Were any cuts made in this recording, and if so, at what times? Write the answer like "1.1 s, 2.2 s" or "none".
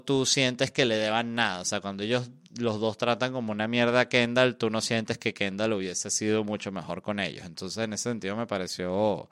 none